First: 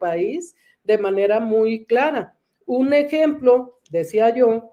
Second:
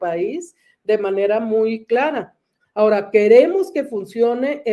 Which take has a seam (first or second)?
second